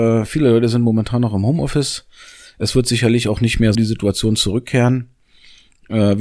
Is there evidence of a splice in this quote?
yes; 1 cut; at 3.7 s

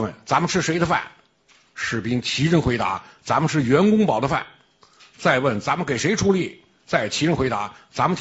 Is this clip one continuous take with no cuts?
yes; 0 cuts

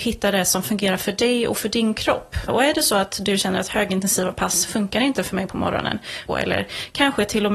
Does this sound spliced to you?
yes; 2 cuts; at 2.5 s, 6.3 s

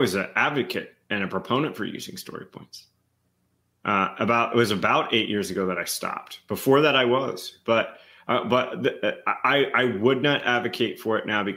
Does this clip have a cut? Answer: no; 0 cuts

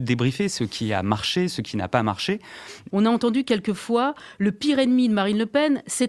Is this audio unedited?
no; 1 cut; at 2.9 s

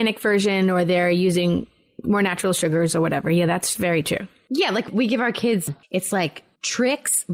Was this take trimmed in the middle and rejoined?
no; 0 cuts

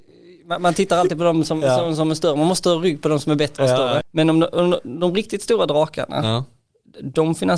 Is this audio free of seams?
no; 1 cut; at 4.0 s

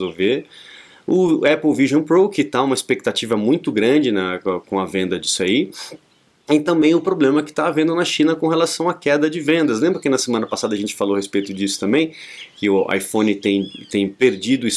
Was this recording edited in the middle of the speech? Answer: yes; 1 cut; at 4.6 s

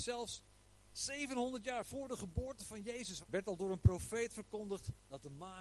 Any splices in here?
yes; 1 cut; at 3.2 s

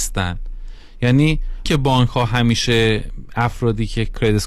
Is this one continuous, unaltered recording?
no; 1 cut; at 1.6 s

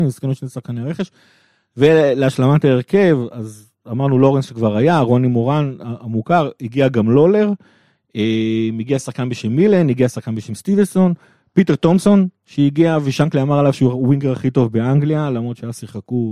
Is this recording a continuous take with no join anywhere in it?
yes; 0 cuts

